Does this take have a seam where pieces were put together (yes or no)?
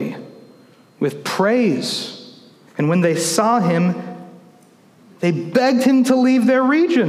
yes